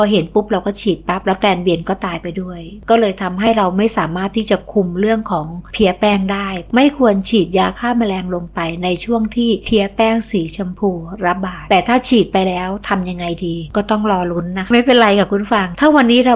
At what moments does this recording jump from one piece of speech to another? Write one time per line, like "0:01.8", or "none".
none